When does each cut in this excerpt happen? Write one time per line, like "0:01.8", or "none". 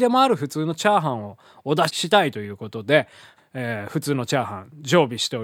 0:01.9
0:03.4